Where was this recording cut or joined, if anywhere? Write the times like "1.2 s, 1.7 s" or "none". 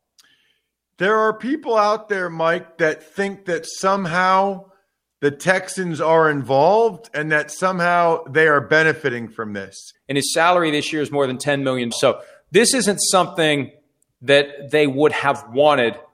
9.9 s, 11.9 s